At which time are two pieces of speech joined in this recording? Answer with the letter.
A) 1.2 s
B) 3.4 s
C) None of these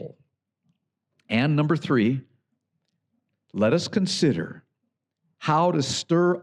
C